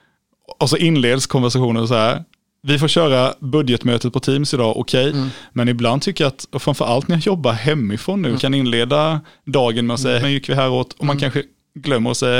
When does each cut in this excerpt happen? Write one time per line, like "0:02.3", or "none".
0:05.1
0:08.4
0:10.2